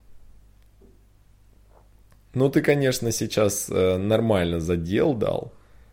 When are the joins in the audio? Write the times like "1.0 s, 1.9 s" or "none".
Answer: none